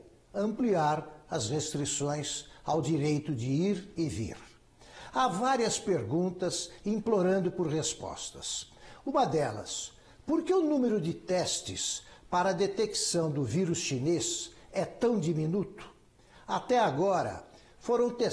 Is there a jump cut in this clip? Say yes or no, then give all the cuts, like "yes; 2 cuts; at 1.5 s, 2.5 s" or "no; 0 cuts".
no; 0 cuts